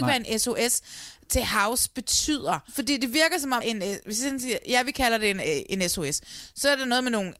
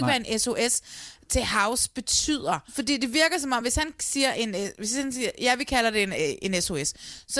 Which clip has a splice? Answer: first; 1 cut; at 3.6 s

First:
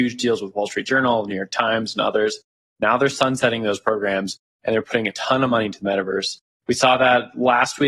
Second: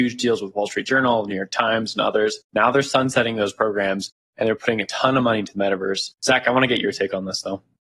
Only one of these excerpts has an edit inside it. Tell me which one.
second; 2 cuts; at 2.4 s, 6.2 s

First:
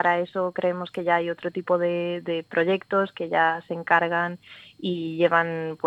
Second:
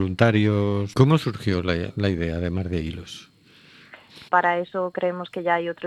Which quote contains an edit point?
second; 2 cuts; at 0.9 s, 4.3 s

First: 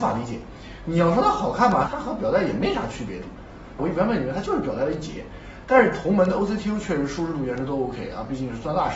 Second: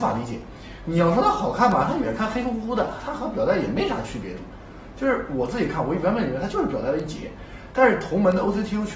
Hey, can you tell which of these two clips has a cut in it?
first; 2 cuts; at 1.9 s, 3.8 s

